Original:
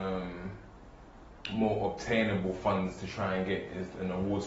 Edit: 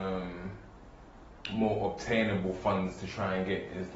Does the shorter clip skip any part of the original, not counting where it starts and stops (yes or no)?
no